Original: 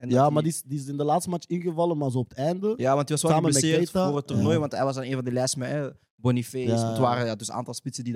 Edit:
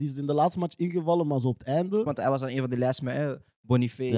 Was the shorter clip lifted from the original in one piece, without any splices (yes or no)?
no